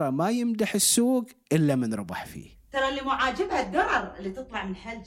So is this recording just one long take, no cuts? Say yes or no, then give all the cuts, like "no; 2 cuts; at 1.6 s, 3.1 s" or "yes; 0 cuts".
yes; 0 cuts